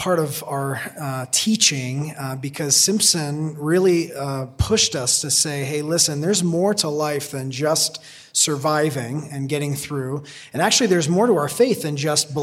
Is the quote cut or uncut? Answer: uncut